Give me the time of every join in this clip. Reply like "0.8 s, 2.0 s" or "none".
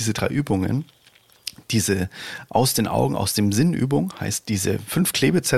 none